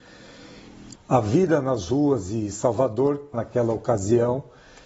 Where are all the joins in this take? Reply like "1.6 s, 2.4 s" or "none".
0.9 s, 3.3 s